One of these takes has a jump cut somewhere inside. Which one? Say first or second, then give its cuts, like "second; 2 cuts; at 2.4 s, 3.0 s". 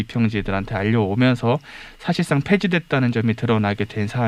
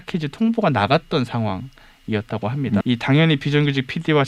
second; 1 cut; at 2.8 s